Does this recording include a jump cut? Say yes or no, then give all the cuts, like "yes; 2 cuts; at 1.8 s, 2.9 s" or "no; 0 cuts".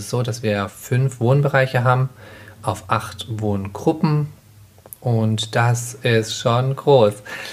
no; 0 cuts